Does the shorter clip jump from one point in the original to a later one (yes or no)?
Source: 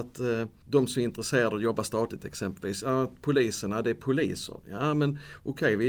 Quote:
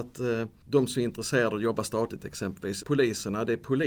yes